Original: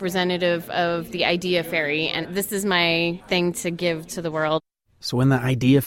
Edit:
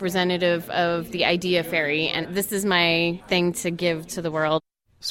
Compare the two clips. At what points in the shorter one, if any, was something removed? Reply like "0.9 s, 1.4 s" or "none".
none